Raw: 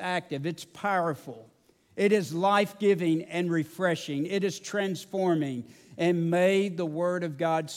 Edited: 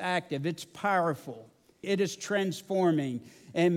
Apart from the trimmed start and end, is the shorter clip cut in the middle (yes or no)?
yes